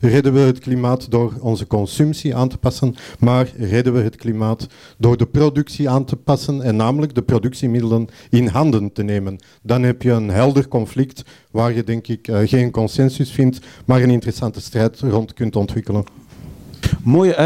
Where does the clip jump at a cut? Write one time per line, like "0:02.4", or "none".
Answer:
none